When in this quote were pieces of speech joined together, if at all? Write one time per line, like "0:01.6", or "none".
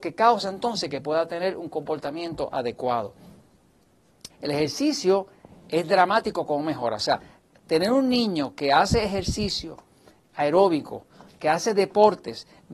0:04.3